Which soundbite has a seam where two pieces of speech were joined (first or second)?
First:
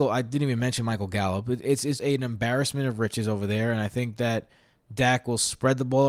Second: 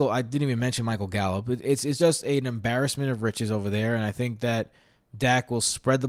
first